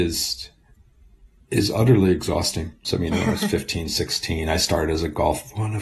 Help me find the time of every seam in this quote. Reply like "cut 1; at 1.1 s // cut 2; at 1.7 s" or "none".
cut 1; at 2.8 s